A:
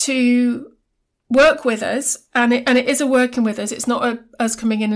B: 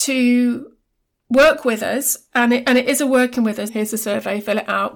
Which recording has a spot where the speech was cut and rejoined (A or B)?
B